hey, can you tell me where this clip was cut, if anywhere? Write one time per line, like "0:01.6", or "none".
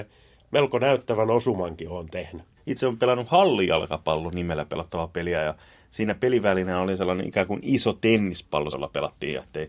0:02.6
0:08.7